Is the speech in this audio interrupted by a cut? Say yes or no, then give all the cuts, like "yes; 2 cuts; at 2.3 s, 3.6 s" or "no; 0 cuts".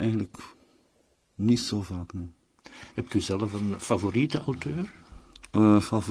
no; 0 cuts